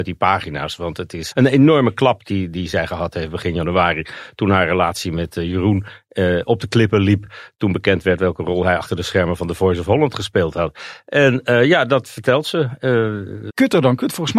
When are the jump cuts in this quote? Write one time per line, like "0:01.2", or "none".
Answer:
0:01.3
0:13.5